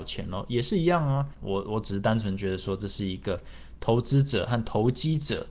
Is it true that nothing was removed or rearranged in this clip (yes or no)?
no